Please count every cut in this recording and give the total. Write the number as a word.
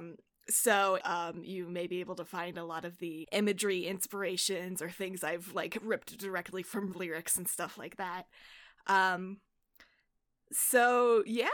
two